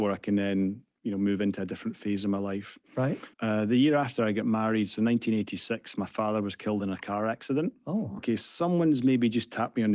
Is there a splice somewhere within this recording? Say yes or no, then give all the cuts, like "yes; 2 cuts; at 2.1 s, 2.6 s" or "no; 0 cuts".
yes; 2 cuts; at 3.3 s, 8.2 s